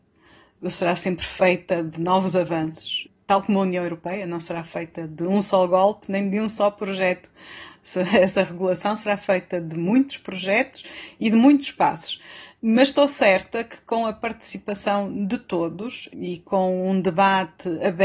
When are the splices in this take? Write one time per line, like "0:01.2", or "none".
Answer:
none